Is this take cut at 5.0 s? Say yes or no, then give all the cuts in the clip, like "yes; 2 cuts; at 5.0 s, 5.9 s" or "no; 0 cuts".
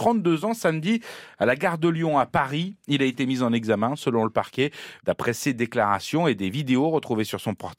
yes; 1 cut; at 5.0 s